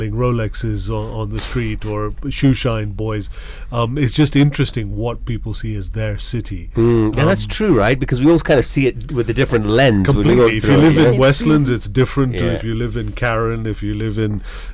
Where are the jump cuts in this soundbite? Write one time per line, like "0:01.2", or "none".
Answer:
none